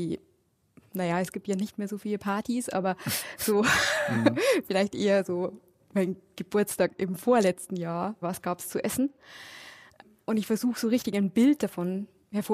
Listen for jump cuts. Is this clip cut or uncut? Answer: cut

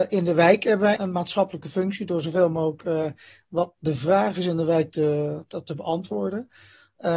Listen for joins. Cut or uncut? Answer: cut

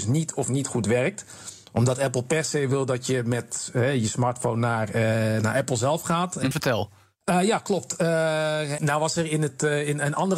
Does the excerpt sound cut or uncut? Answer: cut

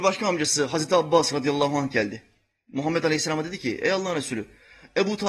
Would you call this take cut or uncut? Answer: uncut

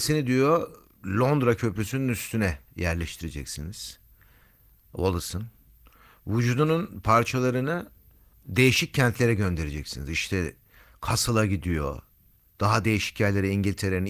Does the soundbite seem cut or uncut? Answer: uncut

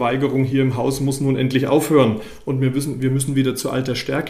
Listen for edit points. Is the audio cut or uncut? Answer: uncut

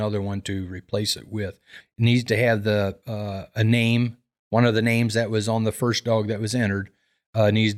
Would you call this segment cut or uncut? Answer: cut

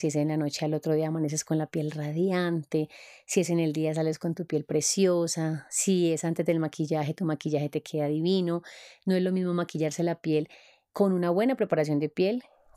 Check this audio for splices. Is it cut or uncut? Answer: uncut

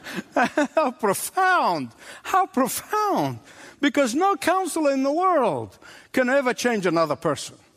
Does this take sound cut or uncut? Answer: uncut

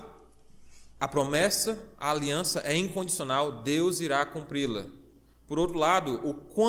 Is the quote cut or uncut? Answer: cut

